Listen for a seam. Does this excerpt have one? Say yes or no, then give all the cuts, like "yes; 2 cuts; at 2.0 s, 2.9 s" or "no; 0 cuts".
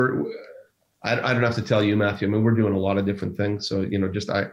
no; 0 cuts